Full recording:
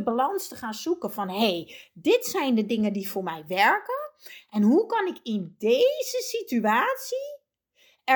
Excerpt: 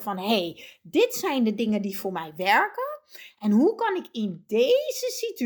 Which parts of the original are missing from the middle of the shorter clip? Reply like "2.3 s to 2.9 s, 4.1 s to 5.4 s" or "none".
none